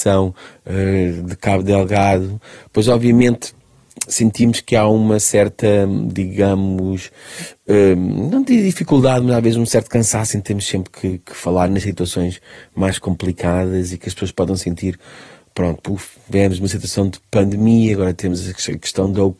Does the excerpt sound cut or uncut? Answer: uncut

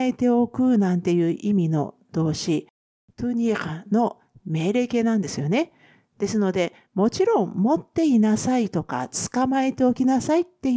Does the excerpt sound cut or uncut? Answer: uncut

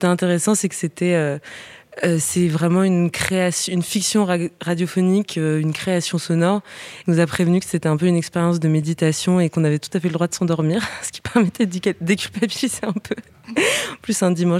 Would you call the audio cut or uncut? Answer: cut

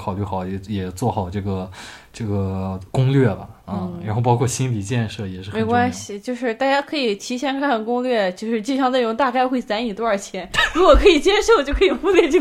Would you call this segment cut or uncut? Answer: uncut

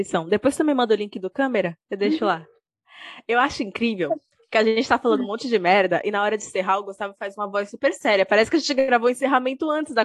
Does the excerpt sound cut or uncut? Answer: uncut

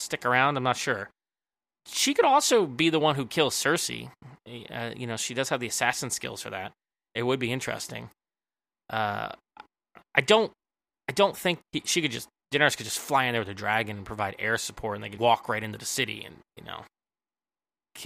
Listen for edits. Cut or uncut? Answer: cut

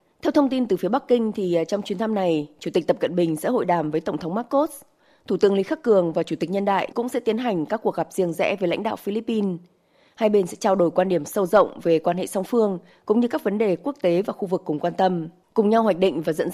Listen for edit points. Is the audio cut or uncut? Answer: cut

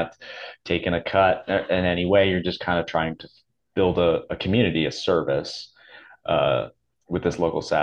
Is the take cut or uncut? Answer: uncut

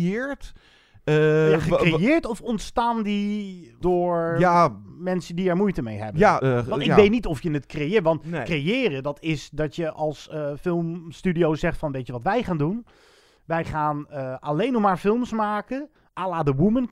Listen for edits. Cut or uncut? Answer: uncut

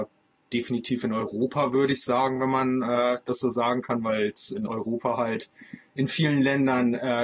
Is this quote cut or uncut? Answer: uncut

